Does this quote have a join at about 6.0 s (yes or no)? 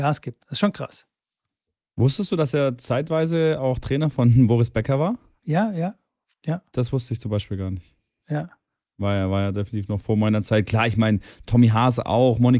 no